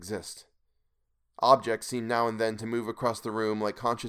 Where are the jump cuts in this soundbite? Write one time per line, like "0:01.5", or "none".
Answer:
none